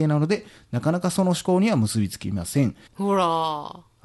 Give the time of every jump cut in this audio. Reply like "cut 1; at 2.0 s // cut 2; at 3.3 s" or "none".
cut 1; at 2.9 s